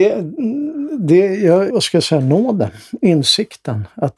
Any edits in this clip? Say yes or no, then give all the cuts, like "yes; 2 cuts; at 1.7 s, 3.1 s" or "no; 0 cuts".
yes; 1 cut; at 1.7 s